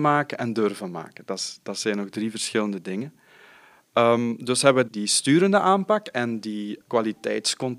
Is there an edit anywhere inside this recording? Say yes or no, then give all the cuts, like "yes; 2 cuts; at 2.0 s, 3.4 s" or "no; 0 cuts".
yes; 2 cuts; at 4.9 s, 6.8 s